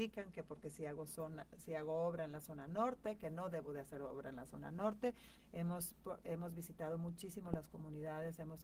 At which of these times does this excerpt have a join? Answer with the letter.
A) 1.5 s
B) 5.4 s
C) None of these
B